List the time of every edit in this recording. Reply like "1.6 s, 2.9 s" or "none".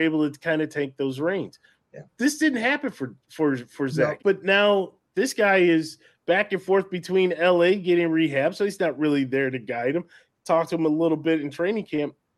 4.2 s

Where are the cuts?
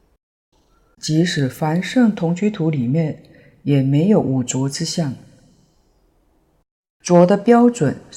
0.9 s

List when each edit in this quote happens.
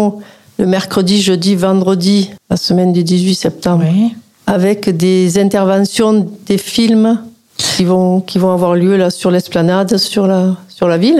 none

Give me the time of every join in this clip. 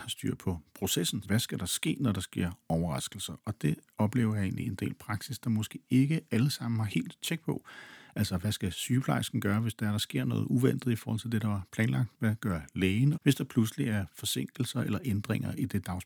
1.2 s, 13.1 s

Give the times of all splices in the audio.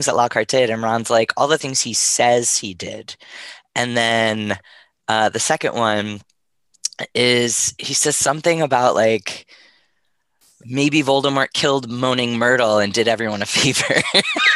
none

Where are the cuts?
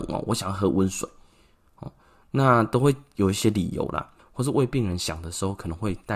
4.2 s

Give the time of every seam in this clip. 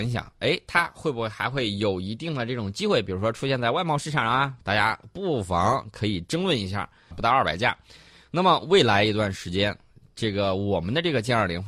4.6 s, 7.1 s

